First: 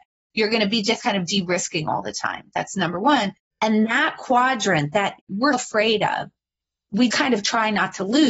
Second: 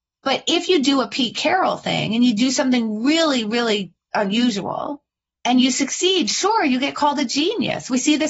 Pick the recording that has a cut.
first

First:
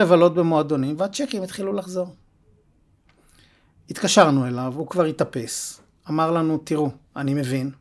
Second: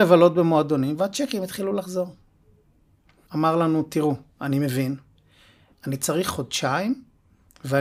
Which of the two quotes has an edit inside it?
second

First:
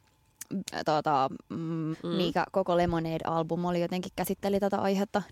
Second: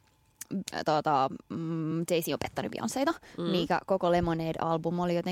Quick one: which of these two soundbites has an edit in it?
first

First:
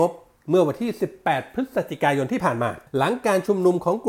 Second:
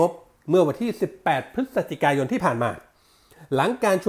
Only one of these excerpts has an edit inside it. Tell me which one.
first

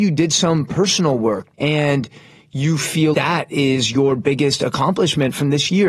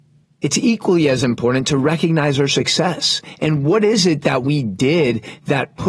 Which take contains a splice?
first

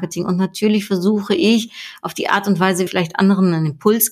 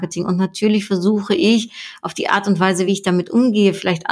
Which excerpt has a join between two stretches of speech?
first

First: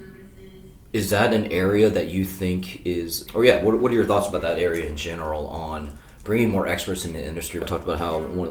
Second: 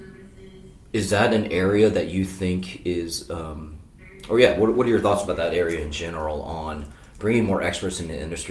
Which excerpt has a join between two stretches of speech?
first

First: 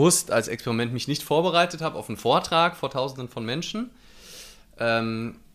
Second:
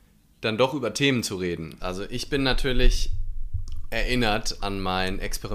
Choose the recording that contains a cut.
second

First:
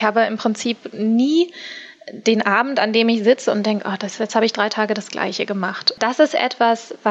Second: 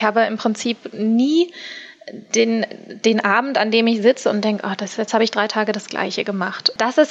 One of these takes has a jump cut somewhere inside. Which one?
first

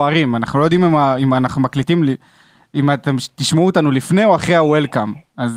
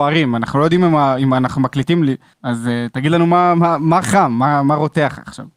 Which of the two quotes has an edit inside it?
second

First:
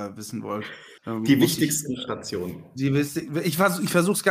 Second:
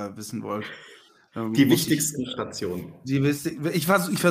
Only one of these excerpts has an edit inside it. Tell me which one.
first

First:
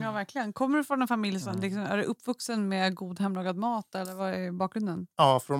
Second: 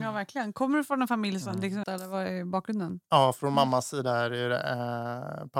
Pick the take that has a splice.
second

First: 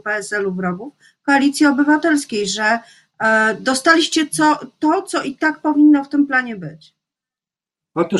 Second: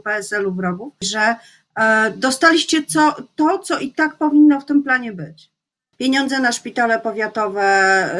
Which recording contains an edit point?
second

